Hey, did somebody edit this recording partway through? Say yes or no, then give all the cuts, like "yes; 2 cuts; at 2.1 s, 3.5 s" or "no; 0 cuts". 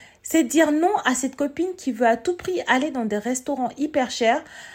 no; 0 cuts